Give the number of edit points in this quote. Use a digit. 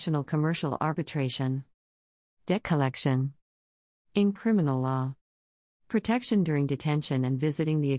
1